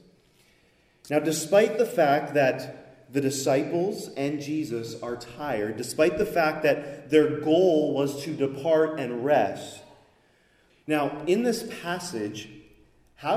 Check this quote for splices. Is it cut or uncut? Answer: cut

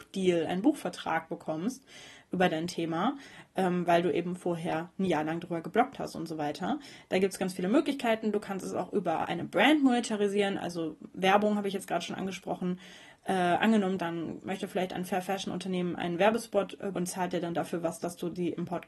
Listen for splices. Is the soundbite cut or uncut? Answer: cut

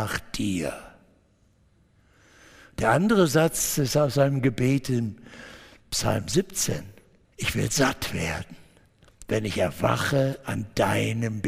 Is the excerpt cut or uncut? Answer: cut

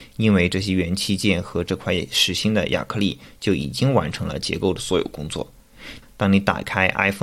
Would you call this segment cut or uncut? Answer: cut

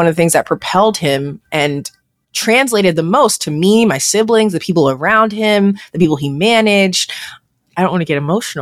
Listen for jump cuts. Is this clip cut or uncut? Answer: uncut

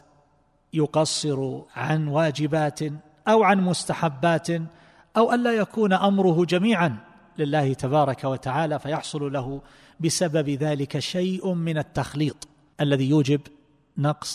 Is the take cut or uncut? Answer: cut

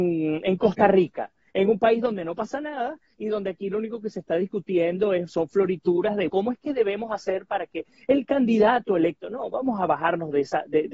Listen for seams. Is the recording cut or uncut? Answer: cut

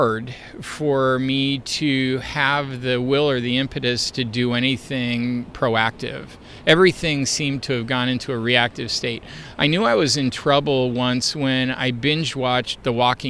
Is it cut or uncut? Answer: uncut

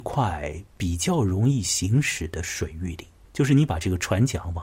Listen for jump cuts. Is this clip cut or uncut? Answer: cut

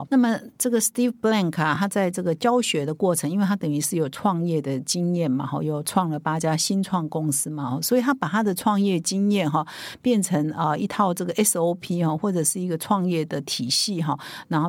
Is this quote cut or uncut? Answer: uncut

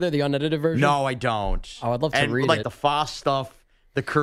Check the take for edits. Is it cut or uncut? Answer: cut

